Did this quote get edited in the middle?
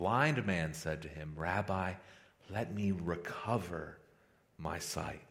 no; 0 cuts

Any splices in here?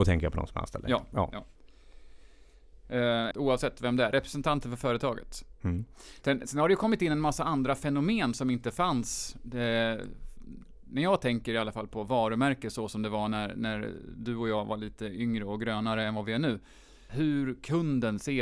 yes; 2 cuts; at 3.3 s, 17.1 s

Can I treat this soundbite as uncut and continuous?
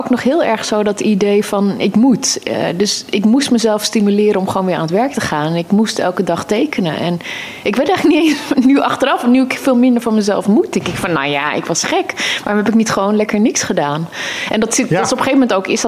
yes; 0 cuts

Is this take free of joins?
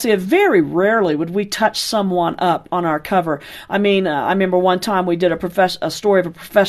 yes; 0 cuts

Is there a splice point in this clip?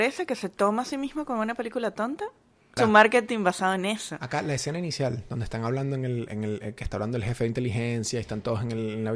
yes; 1 cut; at 2.8 s

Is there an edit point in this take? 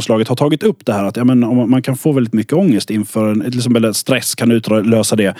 no; 0 cuts

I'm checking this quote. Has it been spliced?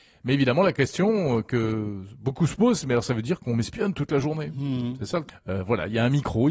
yes; 1 cut; at 5.3 s

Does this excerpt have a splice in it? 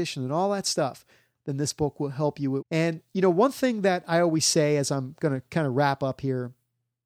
yes; 1 cut; at 2.6 s

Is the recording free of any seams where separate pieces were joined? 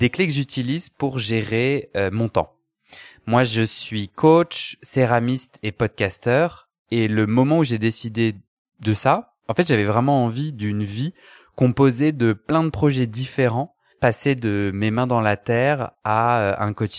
yes; 0 cuts

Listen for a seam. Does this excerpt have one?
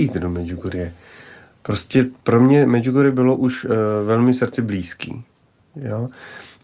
no; 0 cuts

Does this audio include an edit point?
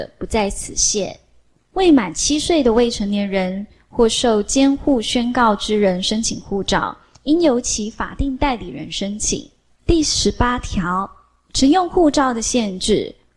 yes; 1 cut; at 9.8 s

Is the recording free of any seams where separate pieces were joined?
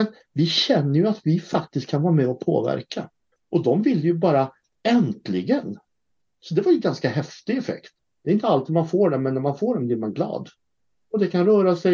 no; 1 cut; at 3.3 s

